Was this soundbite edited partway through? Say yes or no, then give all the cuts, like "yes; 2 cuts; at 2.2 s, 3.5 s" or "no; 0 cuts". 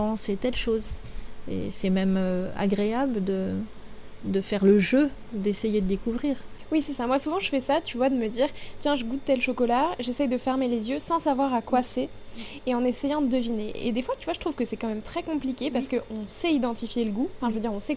no; 0 cuts